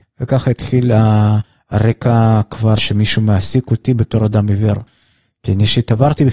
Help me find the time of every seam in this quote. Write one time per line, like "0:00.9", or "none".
0:02.8